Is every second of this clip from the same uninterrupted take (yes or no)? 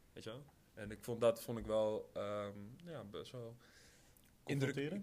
yes